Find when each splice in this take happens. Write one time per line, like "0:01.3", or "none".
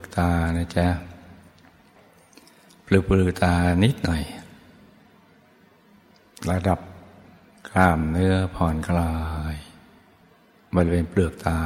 none